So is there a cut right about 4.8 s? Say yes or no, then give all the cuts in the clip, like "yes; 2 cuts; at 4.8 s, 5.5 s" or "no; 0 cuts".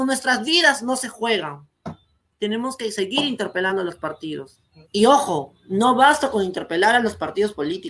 yes; 1 cut; at 4.8 s